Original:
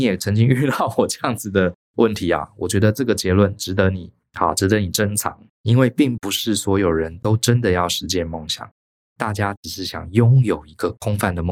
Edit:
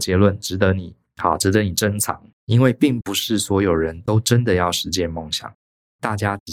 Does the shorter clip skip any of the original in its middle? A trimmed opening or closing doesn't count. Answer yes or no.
no